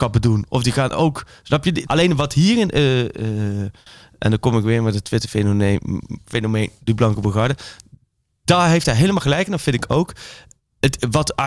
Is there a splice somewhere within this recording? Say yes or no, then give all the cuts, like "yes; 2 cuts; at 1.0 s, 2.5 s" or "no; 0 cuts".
yes; 1 cut; at 1.8 s